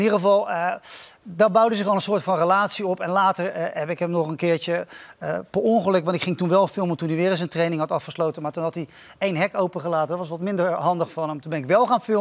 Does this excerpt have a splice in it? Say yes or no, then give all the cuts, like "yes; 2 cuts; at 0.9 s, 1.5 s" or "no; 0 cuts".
no; 0 cuts